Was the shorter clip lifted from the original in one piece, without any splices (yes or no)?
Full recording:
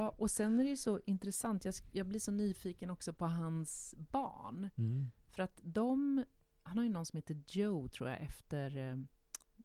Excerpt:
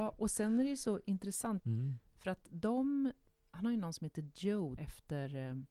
no